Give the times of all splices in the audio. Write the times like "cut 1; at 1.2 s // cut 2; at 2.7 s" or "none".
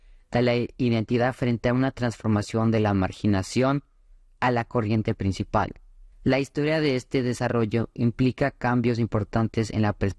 cut 1; at 6.1 s